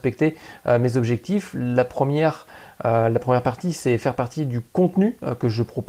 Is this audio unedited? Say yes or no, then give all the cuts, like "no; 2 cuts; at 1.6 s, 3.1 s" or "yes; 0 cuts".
yes; 0 cuts